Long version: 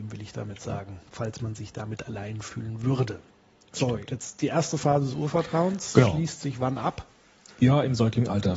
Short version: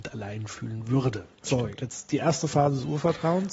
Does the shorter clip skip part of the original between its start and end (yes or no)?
yes